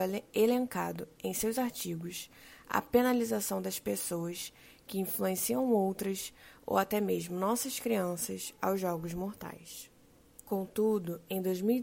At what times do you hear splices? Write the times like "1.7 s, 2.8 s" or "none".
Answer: 10.4 s